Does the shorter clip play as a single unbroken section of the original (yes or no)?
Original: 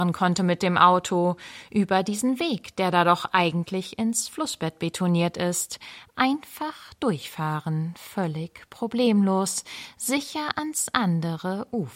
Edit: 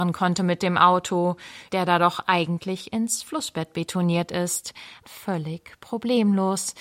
no